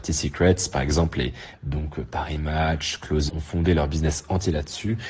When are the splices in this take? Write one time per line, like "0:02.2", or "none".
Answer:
0:01.5
0:03.3